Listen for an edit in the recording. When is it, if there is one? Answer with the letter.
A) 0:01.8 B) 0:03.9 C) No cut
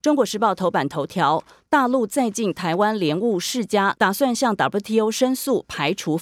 B